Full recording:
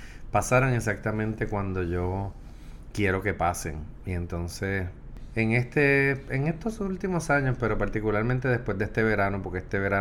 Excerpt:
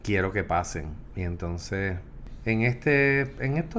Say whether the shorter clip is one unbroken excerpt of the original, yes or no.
yes